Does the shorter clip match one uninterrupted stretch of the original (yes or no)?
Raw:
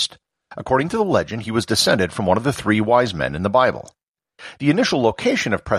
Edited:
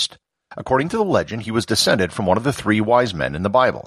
yes